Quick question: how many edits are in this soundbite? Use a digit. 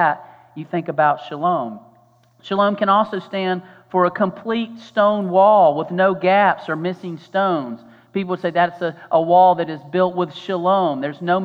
0